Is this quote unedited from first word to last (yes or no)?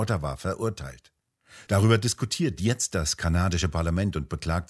no